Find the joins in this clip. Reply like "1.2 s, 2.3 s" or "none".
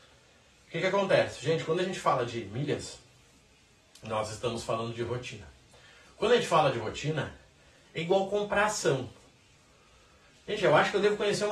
none